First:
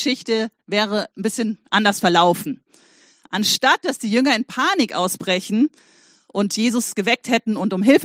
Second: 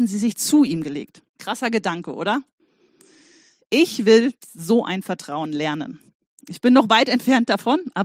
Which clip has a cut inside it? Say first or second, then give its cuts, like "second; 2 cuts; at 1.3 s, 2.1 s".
second; 1 cut; at 1.3 s